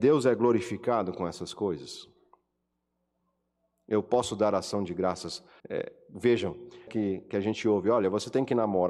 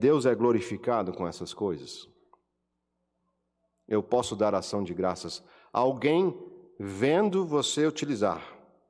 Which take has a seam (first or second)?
first